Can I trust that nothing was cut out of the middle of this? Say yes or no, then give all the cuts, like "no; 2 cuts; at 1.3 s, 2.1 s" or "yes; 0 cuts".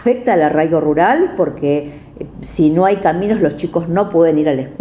yes; 0 cuts